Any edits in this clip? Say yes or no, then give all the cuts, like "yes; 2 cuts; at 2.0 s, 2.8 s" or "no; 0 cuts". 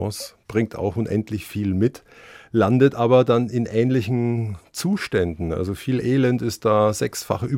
no; 0 cuts